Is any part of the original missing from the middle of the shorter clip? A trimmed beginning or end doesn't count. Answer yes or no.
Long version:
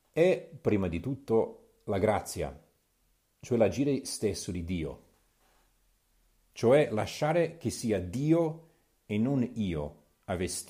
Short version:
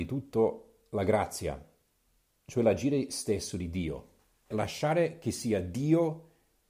yes